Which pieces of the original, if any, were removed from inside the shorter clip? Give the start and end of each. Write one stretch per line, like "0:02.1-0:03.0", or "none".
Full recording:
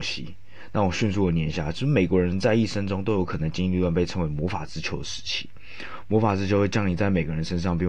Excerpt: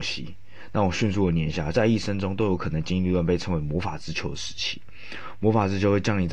0:01.7-0:02.4